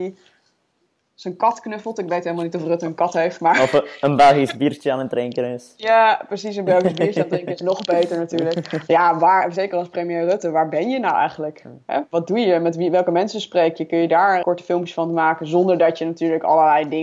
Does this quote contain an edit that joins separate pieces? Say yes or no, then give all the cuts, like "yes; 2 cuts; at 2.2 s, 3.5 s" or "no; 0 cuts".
yes; 2 cuts; at 8.9 s, 14.4 s